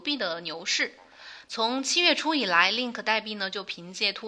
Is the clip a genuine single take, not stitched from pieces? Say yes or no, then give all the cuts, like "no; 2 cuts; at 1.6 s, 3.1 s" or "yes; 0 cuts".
no; 1 cut; at 1.5 s